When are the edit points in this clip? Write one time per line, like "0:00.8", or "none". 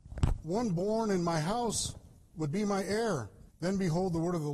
0:03.5